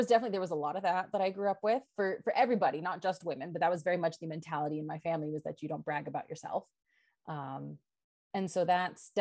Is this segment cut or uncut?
uncut